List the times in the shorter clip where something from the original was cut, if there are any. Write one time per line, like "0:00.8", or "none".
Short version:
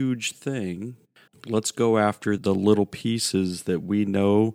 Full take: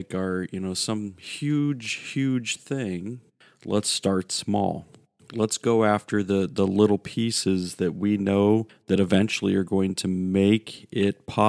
0:01.3
0:02.4